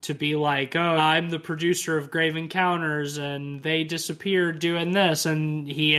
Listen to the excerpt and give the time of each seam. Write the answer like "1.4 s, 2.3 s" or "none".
1.0 s